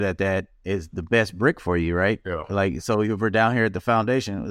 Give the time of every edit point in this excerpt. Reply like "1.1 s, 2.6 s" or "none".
none